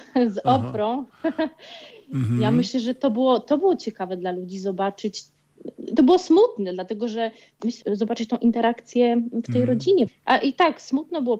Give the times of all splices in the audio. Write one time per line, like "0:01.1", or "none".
0:07.8
0:10.1